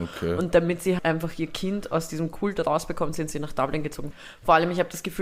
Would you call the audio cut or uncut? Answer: cut